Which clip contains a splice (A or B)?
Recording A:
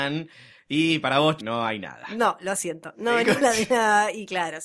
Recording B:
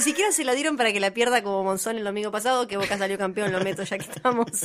A